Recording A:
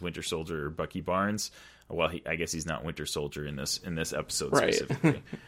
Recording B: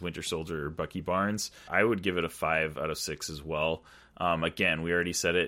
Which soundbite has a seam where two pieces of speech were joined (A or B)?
B